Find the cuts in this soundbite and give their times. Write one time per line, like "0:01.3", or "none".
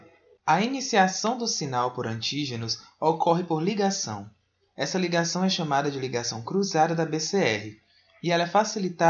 none